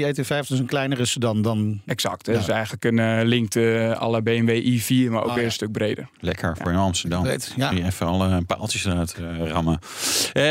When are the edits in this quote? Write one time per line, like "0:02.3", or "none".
0:06.1

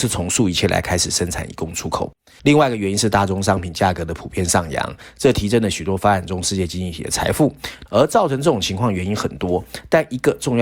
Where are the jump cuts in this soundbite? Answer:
0:02.4
0:07.9

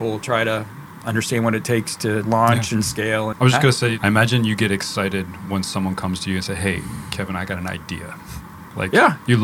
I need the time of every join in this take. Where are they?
0:03.3

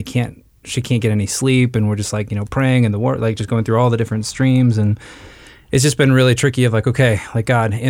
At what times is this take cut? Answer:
none

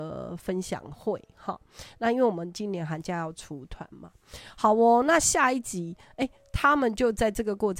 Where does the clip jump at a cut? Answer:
none

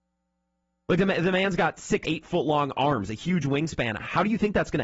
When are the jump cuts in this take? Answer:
0:02.0

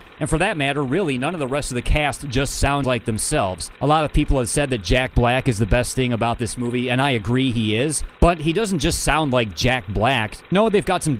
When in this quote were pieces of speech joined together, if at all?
0:03.8

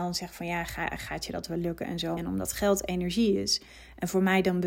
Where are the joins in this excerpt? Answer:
0:02.2

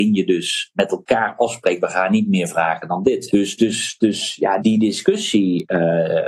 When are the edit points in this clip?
0:03.3
0:04.6

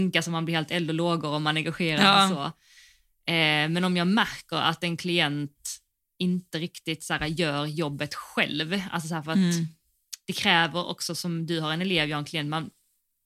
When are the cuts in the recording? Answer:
none

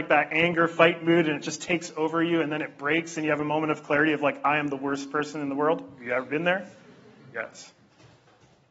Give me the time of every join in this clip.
none

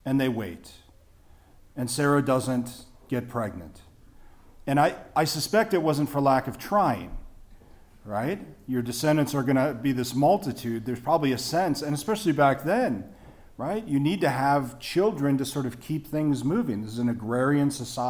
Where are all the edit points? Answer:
none

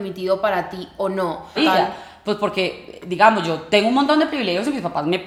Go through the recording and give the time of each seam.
0:01.6

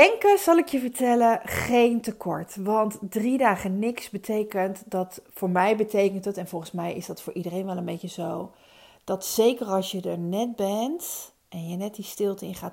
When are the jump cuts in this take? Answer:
none

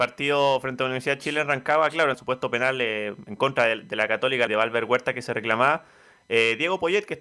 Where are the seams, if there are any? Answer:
0:02.1
0:04.5

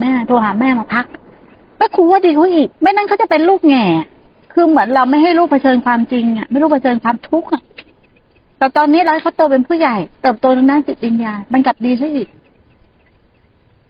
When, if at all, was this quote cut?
0:02.7

